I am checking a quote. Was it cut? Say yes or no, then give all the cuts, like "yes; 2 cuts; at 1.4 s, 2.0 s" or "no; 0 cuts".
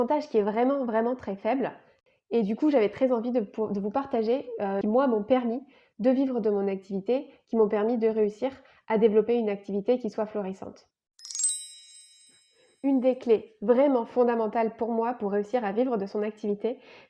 yes; 1 cut; at 4.8 s